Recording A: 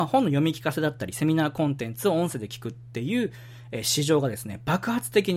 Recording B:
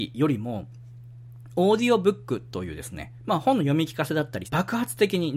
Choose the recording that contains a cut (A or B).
B